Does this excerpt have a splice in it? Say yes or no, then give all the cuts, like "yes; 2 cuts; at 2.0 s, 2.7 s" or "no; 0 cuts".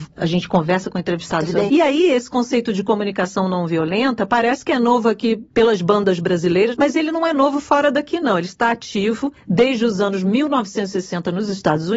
yes; 1 cut; at 1.7 s